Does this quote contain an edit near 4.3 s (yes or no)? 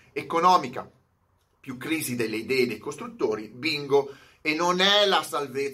no